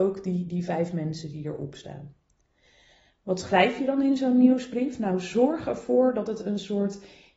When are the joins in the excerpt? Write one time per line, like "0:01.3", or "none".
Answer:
none